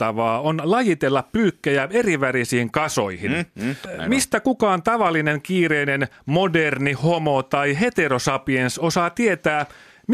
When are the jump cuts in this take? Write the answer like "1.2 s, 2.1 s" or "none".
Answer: 3.9 s